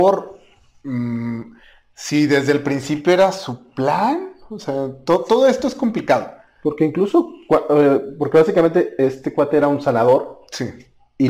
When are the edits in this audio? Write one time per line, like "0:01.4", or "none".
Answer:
none